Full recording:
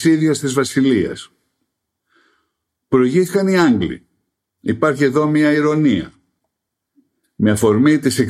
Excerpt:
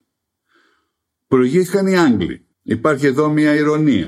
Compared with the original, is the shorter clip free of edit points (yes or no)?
no